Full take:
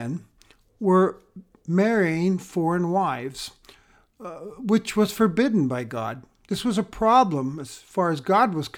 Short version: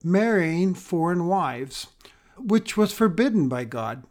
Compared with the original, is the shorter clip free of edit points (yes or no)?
no